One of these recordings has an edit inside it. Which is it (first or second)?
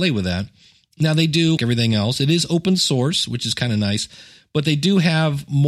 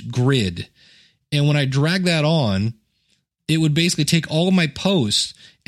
first